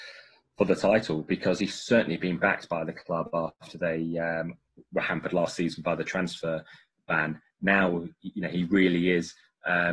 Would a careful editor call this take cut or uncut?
uncut